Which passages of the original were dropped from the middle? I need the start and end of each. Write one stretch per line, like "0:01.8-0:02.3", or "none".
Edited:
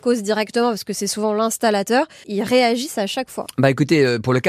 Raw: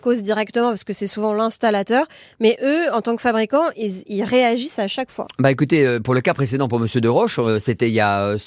0:02.2-0:04.0